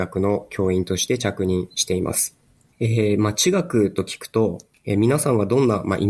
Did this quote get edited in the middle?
yes; 1 cut; at 2.7 s

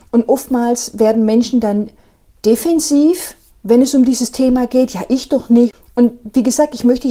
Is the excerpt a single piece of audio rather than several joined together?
yes; 0 cuts

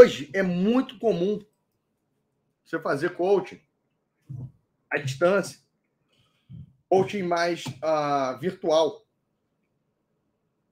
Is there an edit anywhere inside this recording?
no; 0 cuts

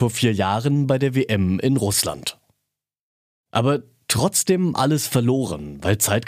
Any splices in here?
yes; 1 cut; at 3.4 s

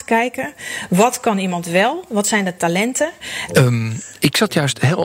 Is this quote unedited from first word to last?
no; 1 cut; at 3.5 s

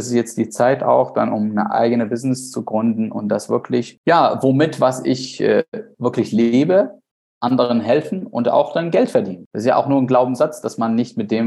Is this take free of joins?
yes; 0 cuts

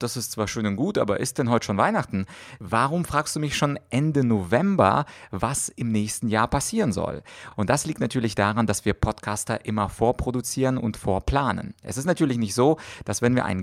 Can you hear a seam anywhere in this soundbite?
no; 0 cuts

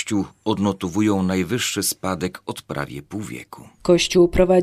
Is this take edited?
no; 0 cuts

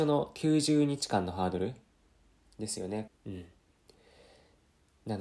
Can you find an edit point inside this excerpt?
yes; 1 cut; at 3.1 s

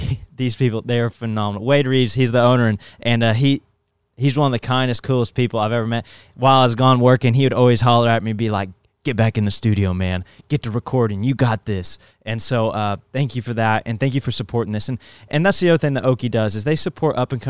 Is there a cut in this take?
no; 0 cuts

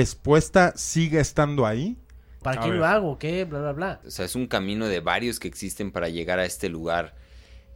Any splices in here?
yes; 2 cuts; at 2.4 s, 4.0 s

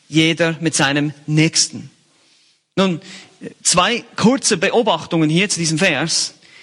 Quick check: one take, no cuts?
yes; 0 cuts

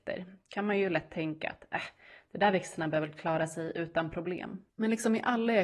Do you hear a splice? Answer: yes; 1 cut; at 4.7 s

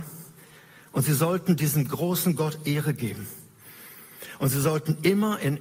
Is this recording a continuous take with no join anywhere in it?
yes; 0 cuts

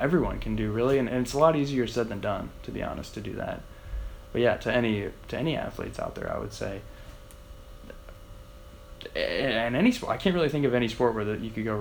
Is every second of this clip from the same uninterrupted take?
no; 2 cuts; at 1.1 s, 4.2 s

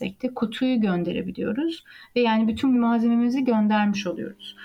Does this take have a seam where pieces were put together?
yes; 1 cut; at 2.7 s

